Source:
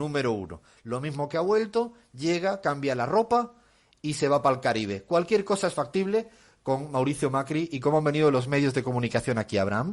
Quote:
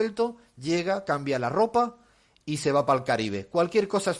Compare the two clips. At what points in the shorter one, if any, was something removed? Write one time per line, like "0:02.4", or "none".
none